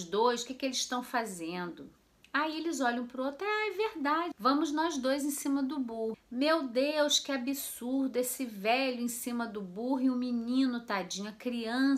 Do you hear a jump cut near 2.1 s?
no; 2 cuts; at 4.3 s, 6.1 s

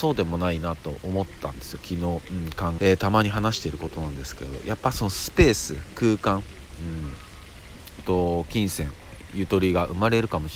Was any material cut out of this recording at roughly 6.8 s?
no; 2 cuts; at 2.8 s, 8.0 s

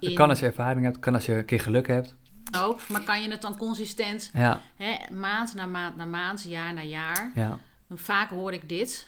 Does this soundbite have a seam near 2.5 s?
yes; 1 cut; at 2.5 s

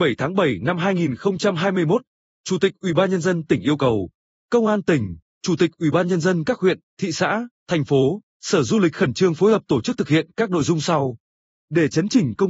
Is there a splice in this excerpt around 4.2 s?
no; 1 cut; at 11.5 s

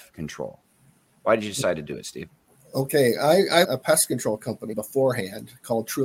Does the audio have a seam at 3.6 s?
yes; 2 cuts; at 3.6 s, 4.7 s

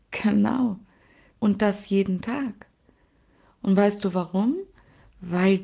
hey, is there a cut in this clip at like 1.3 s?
yes; 1 cut; at 1.3 s

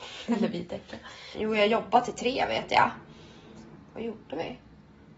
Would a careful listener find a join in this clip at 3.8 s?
yes; 2 cuts; at 1.3 s, 3.8 s

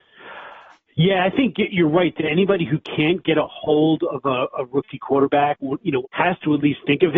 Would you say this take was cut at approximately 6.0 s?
yes; 1 cut; at 6.0 s

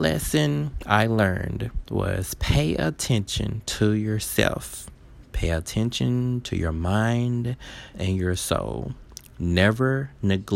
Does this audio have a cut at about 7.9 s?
yes; 1 cut; at 7.9 s

